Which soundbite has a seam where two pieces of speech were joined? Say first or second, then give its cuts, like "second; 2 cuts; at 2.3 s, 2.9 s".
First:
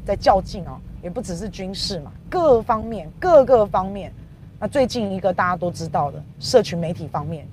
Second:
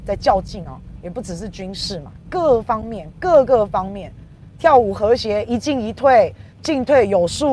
second; 1 cut; at 4.6 s